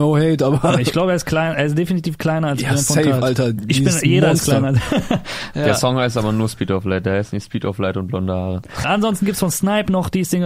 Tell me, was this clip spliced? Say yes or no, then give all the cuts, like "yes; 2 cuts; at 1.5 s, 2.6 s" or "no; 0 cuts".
yes; 1 cut; at 8.8 s